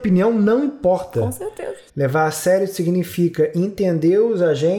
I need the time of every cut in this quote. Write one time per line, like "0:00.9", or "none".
0:01.9